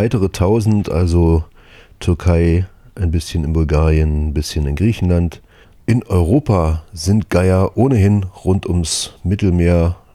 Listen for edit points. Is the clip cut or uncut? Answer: cut